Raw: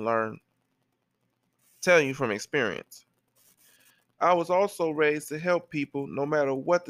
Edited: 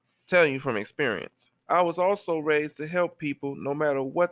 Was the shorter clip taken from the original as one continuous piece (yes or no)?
no